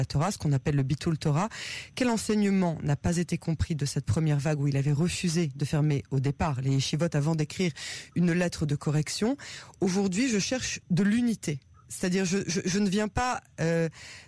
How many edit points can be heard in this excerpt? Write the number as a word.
one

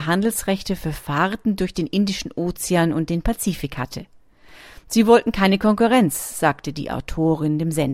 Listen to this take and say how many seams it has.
zero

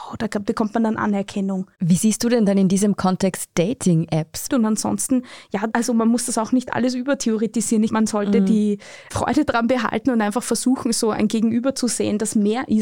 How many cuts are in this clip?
one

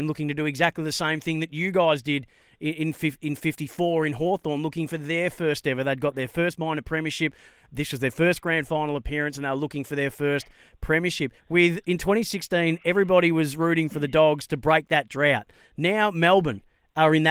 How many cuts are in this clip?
one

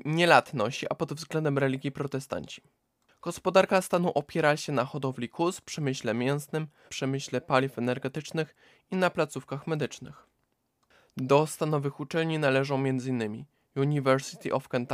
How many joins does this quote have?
one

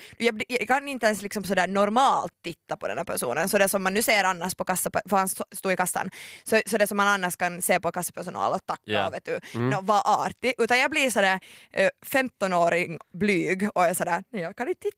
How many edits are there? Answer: zero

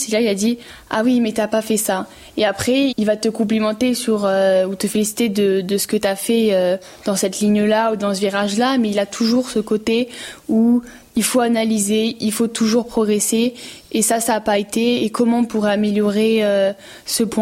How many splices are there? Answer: one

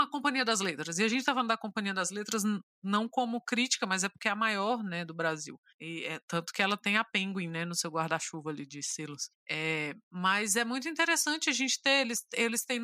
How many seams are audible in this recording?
zero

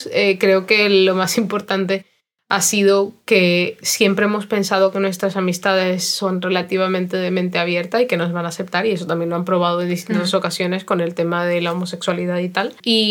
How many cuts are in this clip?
zero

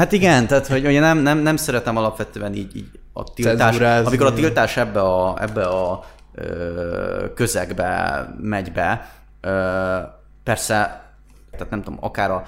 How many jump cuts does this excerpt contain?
one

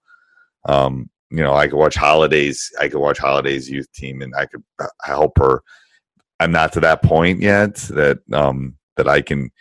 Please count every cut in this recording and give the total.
zero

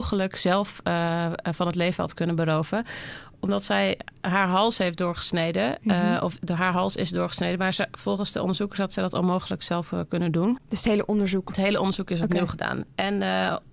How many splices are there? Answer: one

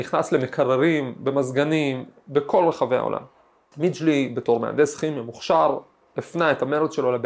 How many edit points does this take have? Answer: one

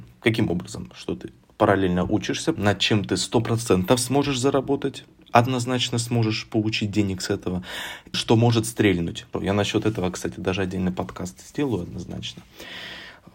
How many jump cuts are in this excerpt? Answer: three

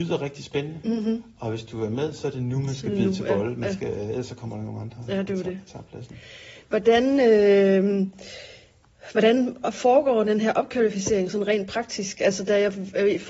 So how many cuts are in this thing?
zero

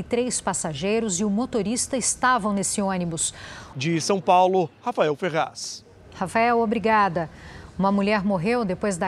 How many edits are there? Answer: one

